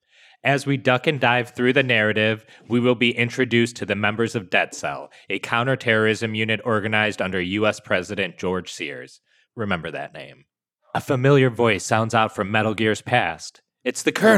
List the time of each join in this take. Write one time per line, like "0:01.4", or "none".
none